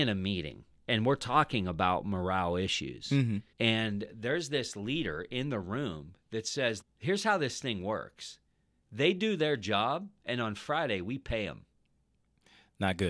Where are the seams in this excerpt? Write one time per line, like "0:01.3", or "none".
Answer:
0:03.5
0:06.8